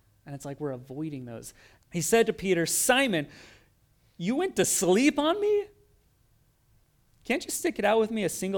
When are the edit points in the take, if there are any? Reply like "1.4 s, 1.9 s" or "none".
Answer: 1.8 s